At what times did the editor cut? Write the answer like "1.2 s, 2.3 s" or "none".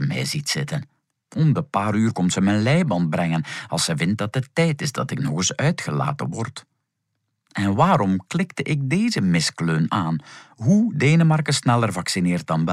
none